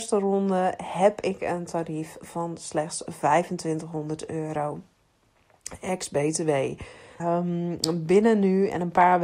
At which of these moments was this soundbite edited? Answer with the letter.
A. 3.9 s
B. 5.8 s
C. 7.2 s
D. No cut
C